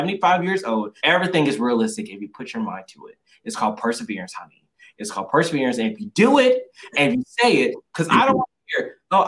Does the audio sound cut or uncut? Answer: cut